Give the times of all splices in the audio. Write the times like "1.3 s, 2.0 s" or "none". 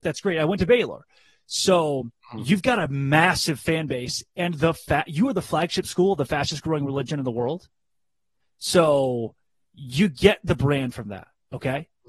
none